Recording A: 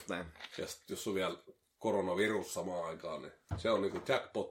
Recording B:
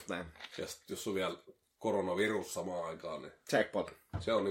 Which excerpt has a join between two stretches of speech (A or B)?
A